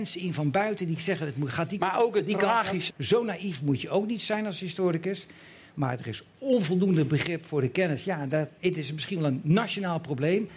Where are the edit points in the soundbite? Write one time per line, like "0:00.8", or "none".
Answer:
0:02.9